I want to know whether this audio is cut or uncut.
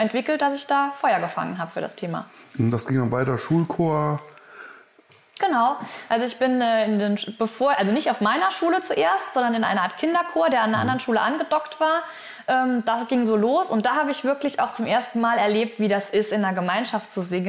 uncut